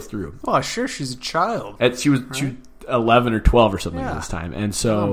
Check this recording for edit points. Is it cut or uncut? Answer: uncut